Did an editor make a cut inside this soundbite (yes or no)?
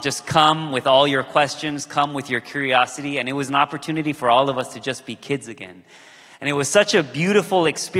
no